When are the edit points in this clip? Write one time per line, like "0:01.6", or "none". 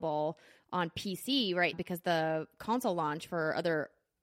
0:01.7